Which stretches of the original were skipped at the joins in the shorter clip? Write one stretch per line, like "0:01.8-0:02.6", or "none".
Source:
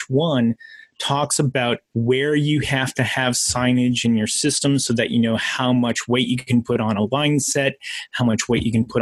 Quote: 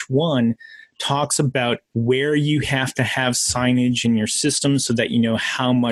none